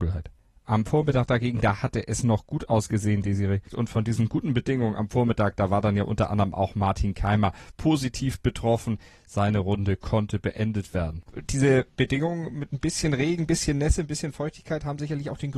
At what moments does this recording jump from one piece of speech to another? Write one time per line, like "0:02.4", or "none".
none

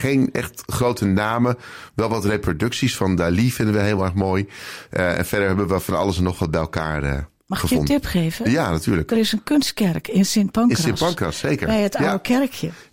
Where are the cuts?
none

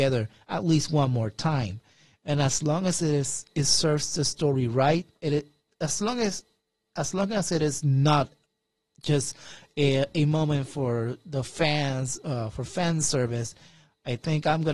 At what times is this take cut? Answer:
0:05.2

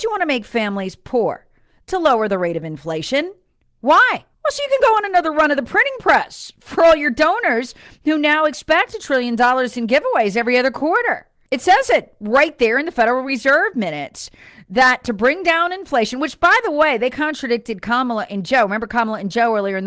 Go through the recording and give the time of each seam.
0:04.3

